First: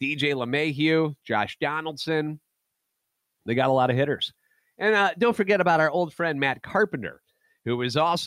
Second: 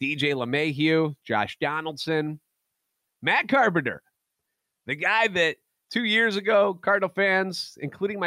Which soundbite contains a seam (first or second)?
second